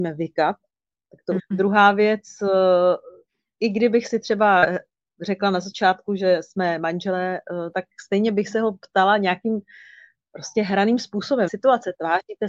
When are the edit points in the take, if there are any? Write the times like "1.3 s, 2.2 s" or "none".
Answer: 1.4 s, 7.7 s, 11.5 s